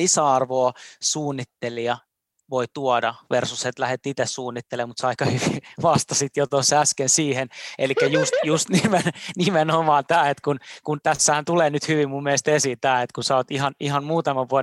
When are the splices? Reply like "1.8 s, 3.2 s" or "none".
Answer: none